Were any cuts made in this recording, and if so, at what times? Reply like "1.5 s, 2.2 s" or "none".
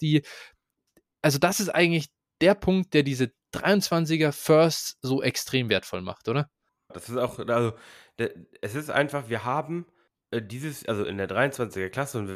6.9 s